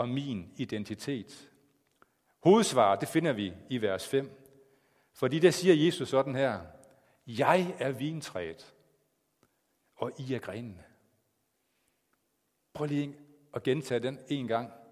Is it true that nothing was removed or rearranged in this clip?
yes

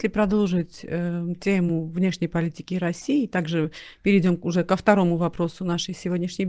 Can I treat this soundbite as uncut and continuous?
yes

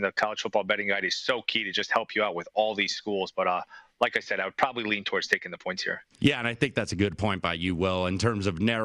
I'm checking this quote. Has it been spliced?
no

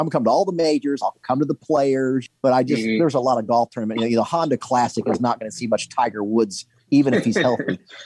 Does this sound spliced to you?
no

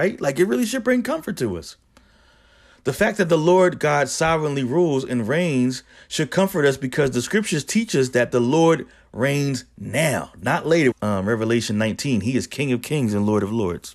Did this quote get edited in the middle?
yes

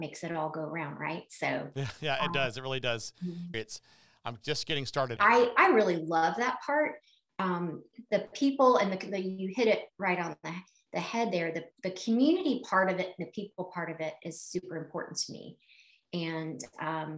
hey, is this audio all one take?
no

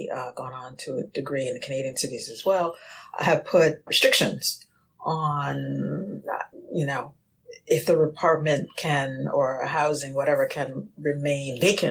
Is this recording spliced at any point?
yes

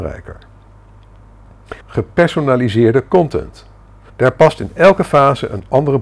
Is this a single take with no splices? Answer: no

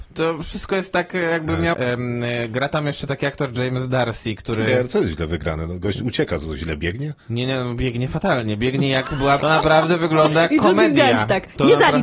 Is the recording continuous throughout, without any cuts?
no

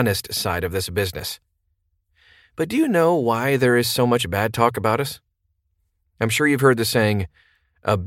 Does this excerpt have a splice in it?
yes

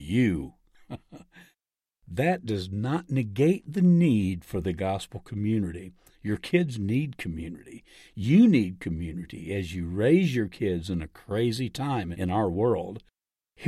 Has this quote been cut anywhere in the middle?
no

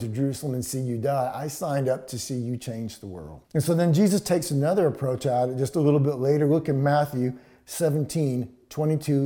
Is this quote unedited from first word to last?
no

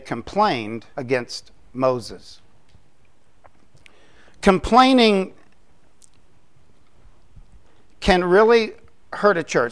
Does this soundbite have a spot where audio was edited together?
yes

